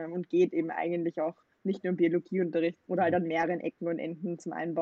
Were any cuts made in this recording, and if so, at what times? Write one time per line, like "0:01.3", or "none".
0:02.8